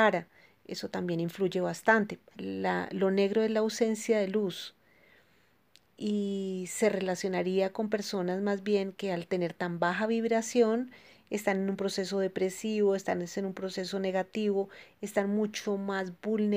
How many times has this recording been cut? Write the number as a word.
one